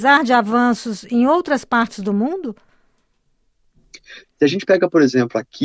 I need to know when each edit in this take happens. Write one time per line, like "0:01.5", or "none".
0:04.2